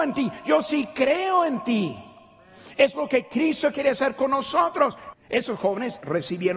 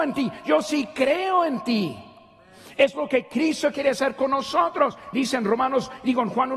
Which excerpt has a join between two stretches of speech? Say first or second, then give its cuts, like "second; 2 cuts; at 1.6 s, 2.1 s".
first; 1 cut; at 5.1 s